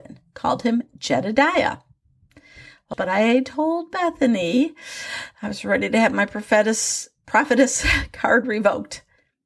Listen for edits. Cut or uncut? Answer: cut